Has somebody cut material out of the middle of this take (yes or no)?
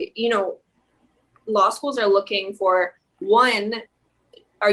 no